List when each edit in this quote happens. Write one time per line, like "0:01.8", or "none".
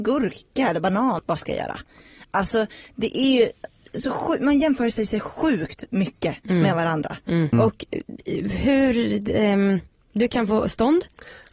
0:01.2
0:07.5